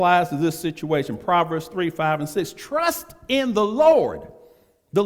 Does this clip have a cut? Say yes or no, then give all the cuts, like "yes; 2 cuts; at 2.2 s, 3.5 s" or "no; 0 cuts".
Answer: no; 0 cuts